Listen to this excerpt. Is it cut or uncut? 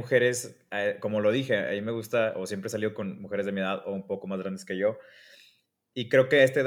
uncut